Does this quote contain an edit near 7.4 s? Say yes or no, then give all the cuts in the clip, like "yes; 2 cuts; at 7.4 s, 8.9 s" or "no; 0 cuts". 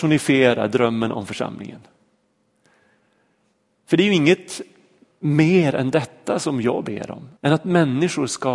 yes; 1 cut; at 7.4 s